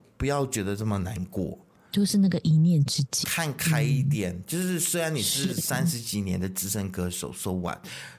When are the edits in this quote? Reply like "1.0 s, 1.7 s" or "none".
3.2 s